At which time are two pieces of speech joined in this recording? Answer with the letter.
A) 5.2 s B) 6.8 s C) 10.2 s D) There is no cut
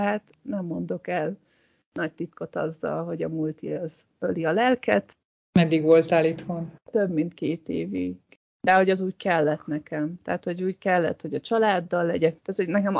D